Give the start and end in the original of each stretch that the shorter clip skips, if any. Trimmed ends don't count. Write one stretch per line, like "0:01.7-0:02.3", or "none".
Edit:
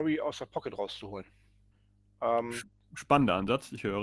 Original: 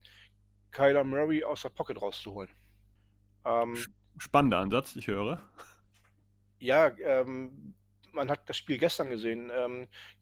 none